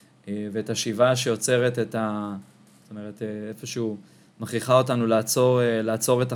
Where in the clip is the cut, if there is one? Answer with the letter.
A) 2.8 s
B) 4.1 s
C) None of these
A